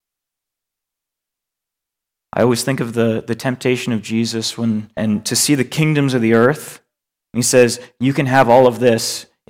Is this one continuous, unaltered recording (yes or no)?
no